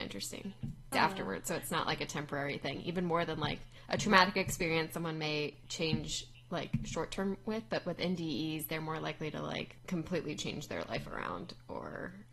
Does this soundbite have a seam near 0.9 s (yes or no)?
yes